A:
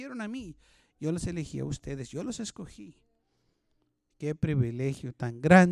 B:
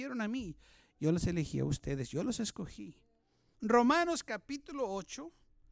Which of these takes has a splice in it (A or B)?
B